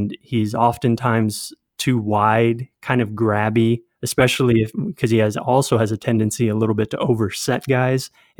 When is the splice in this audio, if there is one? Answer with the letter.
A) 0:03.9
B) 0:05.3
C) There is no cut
C